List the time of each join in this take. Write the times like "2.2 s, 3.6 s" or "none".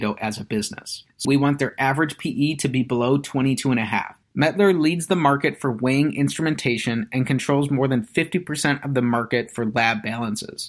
1.2 s, 4.2 s